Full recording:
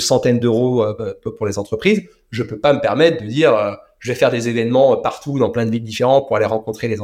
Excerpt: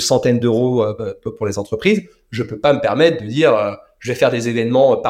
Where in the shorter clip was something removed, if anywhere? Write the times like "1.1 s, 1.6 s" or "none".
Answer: none